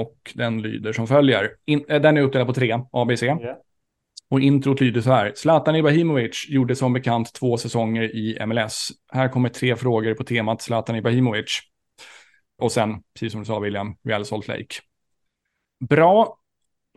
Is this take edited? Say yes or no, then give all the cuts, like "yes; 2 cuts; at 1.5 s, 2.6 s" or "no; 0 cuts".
yes; 2 cuts; at 4.2 s, 12.6 s